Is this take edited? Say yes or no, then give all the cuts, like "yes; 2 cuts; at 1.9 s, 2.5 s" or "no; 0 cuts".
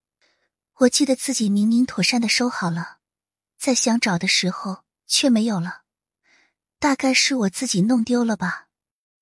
no; 0 cuts